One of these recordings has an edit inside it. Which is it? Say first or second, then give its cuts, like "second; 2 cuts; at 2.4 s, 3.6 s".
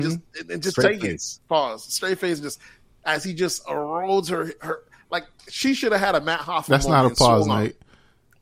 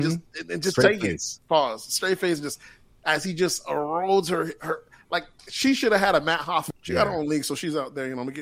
second; 1 cut; at 6.7 s